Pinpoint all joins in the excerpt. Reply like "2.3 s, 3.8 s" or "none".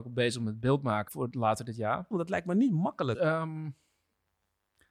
1.1 s, 2.1 s, 3.1 s